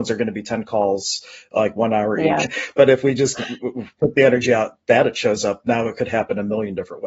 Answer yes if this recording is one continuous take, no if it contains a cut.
no